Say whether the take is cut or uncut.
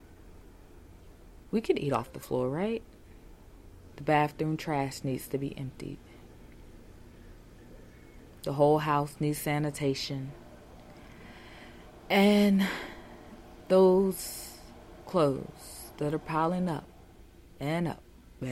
cut